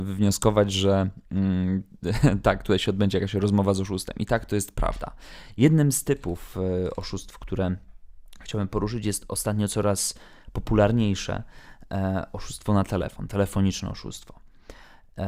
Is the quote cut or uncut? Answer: uncut